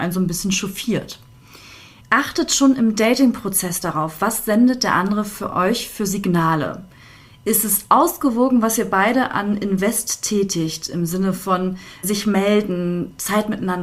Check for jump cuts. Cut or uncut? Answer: cut